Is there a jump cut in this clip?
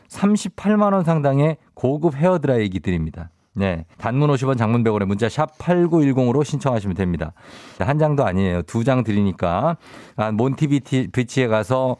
yes; 2 cuts; at 3.9 s, 7.8 s

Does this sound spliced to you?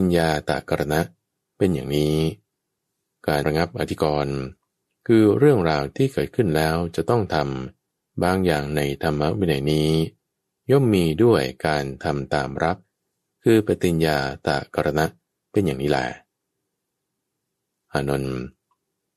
yes; 1 cut; at 3.4 s

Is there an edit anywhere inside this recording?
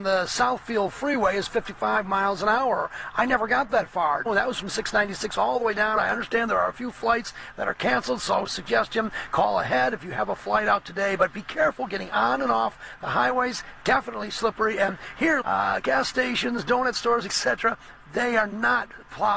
yes; 3 cuts; at 4.3 s, 6.0 s, 15.4 s

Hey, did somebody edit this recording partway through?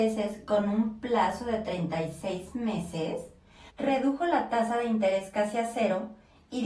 yes; 1 cut; at 3.7 s

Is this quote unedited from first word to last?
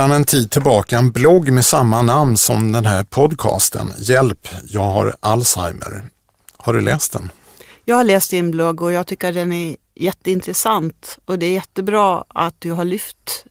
yes; 0 cuts

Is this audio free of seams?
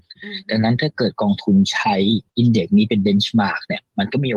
no; 1 cut; at 2.3 s

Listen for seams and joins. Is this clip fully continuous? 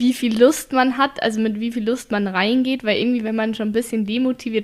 yes; 0 cuts

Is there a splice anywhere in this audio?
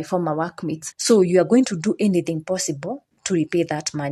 yes; 1 cut; at 0.9 s

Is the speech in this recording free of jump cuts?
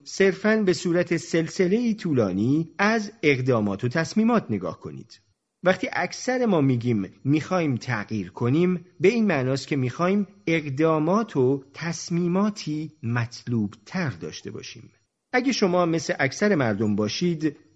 no; 2 cuts; at 5.5 s, 15.2 s

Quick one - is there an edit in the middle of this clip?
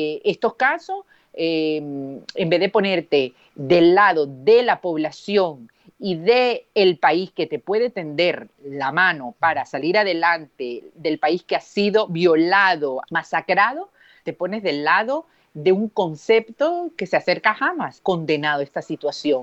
yes; 2 cuts; at 13.0 s, 18.0 s

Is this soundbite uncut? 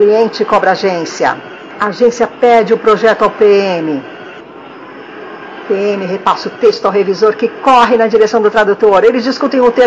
yes; 0 cuts

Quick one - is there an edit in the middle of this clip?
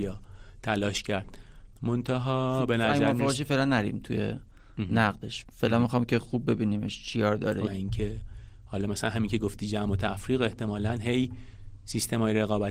yes; 1 cut; at 7.7 s

